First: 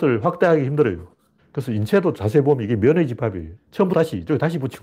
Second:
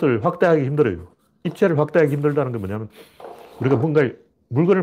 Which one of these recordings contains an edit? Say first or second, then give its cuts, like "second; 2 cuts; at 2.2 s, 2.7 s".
first; 2 cuts; at 1.4 s, 3.6 s